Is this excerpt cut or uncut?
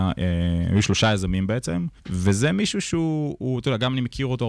cut